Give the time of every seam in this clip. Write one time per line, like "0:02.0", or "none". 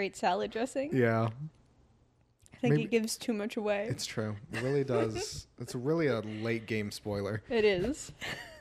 none